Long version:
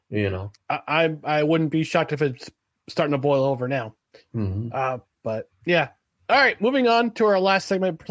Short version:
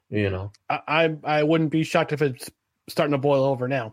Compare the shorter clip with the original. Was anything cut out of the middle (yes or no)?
no